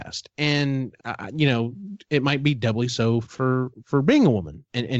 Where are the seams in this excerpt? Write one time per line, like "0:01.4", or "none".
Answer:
0:01.0
0:03.2